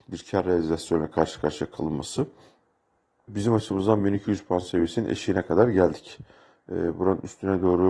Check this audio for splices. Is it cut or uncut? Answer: cut